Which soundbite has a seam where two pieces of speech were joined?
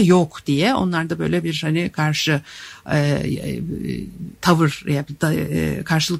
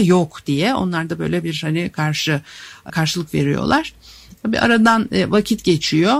second; 2 cuts; at 2.9 s, 4.4 s

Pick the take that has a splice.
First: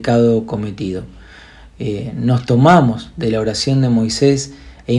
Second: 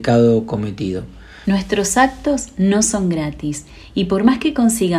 second; 1 cut; at 1.4 s

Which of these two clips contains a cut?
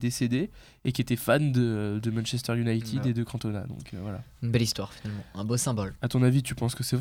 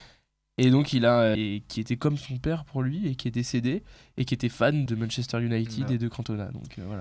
second; 2 cuts; at 1.3 s, 4.9 s

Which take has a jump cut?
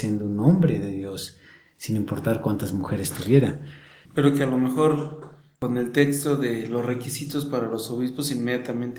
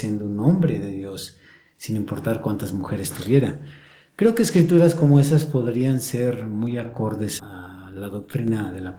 first; 1 cut; at 4.1 s

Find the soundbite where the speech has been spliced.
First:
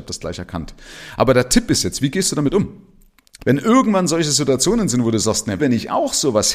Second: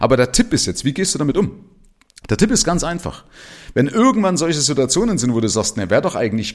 first; 2 cuts; at 3.4 s, 5.6 s

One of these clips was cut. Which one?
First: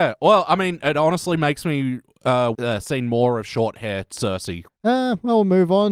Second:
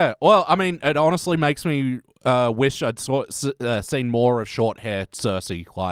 first; 2 cuts; at 2.5 s, 4.7 s

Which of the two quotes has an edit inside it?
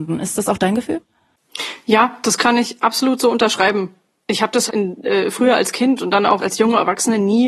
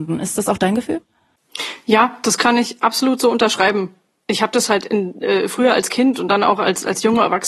first; 2 cuts; at 4.7 s, 6.4 s

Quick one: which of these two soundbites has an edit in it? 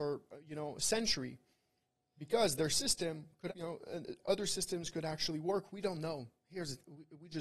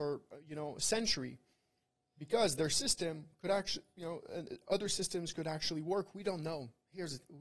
first; 1 cut; at 3.5 s

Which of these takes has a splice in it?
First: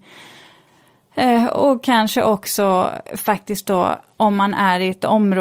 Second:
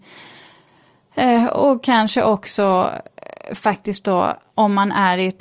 first; 1 cut; at 3.1 s

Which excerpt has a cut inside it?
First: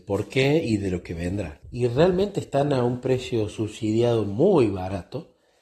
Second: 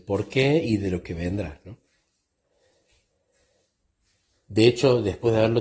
first; 1 cut; at 1.6 s

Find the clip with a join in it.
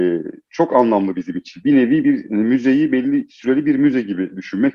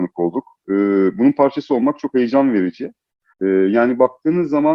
second; 1 cut; at 3.3 s

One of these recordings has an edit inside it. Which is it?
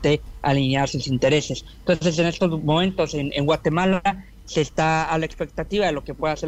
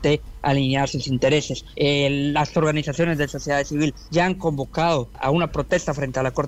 second; 2 cuts; at 1.7 s, 5.1 s

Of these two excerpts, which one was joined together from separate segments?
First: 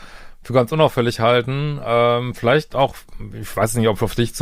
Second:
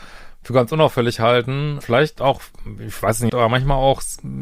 second; 2 cuts; at 1.8 s, 3.3 s

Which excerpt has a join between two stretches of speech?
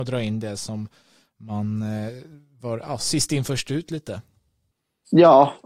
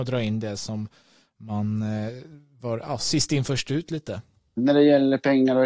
second; 1 cut; at 4.6 s

